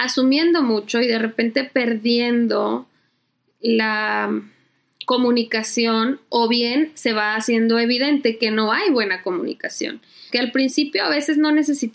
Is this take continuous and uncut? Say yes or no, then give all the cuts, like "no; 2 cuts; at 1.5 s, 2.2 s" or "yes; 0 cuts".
no; 1 cut; at 10.3 s